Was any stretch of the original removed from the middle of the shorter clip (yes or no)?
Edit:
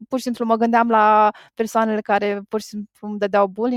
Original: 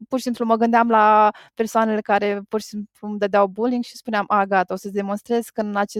no